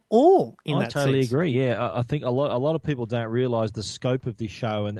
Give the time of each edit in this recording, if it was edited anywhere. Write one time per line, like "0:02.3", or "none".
none